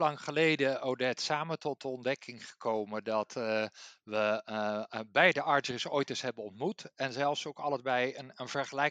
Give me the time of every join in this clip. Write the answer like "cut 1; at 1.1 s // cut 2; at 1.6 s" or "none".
none